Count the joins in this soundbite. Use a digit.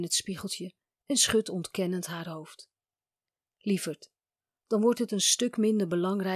1